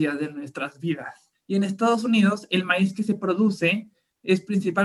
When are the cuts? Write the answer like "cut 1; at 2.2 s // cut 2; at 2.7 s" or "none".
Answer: cut 1; at 1.3 s